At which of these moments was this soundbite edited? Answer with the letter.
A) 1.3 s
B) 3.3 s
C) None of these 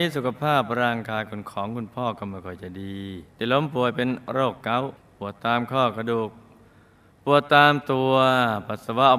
B